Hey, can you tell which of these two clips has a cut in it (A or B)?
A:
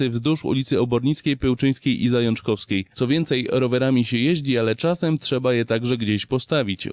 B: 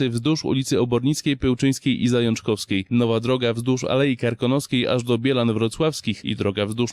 A